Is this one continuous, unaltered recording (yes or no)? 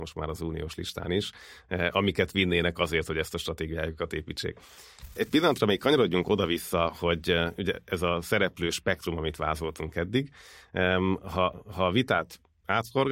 yes